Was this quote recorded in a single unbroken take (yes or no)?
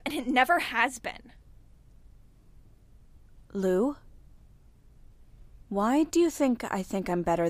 yes